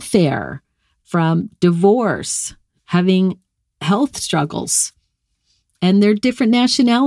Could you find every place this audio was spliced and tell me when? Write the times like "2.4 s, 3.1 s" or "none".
2.8 s